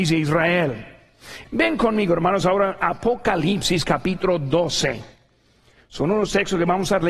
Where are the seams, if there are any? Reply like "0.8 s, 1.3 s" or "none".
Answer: 1.4 s